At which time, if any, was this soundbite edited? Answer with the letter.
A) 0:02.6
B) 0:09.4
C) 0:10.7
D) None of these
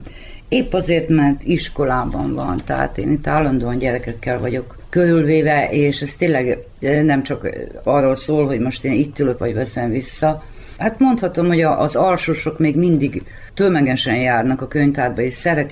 B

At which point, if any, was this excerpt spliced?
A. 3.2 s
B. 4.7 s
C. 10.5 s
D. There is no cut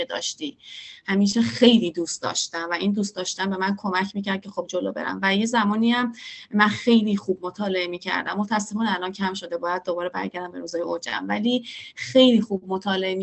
B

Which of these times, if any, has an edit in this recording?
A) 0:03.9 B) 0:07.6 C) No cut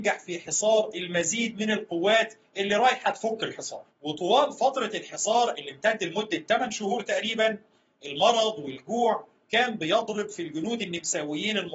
A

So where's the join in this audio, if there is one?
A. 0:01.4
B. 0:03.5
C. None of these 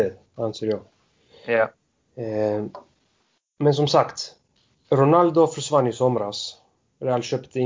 C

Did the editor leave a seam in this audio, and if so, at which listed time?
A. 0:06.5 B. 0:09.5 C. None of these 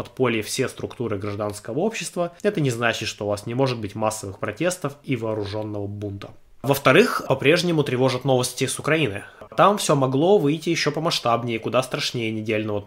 B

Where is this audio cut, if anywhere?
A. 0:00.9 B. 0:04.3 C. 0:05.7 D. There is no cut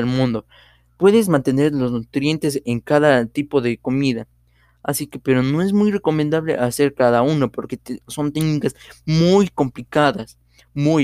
D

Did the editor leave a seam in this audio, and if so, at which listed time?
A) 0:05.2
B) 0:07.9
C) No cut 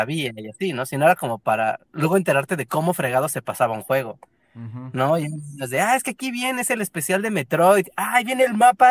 C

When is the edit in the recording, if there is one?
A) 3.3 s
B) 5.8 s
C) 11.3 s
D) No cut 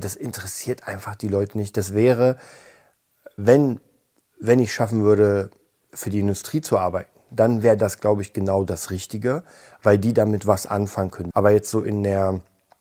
C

